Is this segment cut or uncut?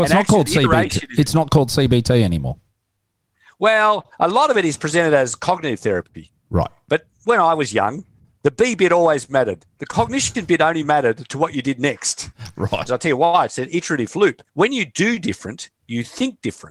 cut